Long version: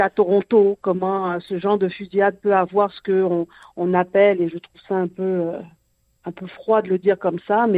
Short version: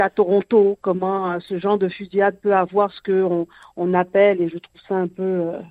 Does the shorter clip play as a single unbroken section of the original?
yes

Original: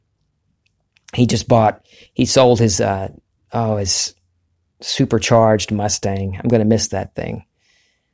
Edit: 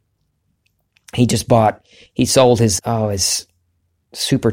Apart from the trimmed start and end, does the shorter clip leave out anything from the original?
yes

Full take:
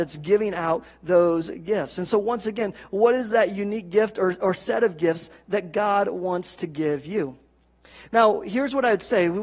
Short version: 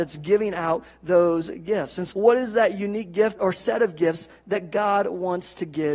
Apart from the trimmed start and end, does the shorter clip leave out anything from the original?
yes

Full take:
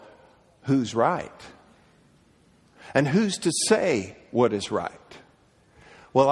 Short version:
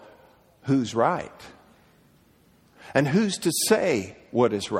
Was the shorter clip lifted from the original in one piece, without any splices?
yes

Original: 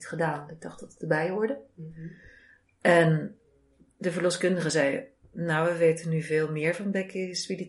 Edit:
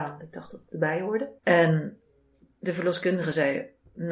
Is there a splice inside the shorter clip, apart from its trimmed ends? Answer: yes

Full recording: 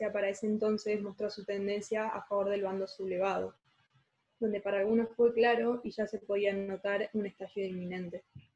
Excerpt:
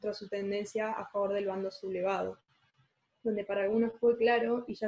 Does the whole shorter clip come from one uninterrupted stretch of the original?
yes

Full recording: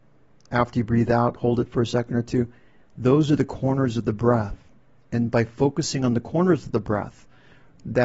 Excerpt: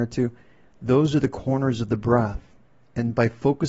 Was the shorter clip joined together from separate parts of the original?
no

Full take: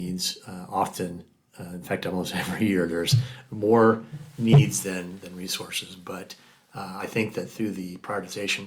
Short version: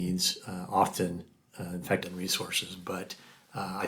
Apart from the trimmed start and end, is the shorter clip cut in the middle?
yes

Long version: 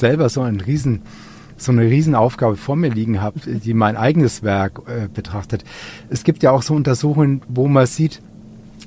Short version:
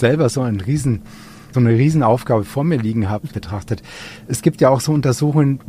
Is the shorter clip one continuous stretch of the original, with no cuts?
no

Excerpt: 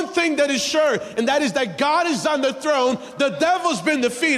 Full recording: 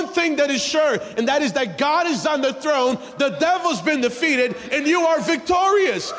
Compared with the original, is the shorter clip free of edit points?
yes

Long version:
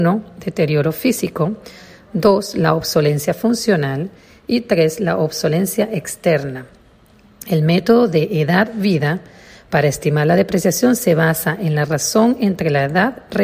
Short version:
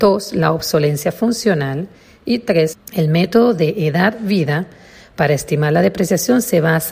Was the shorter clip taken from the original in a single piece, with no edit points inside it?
no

